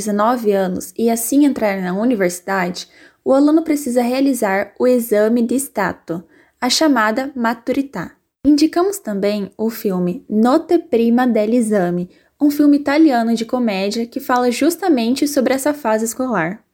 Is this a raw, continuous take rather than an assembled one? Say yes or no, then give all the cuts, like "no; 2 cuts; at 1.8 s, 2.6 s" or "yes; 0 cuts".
yes; 0 cuts